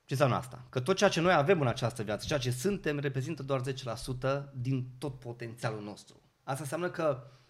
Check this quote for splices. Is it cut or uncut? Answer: uncut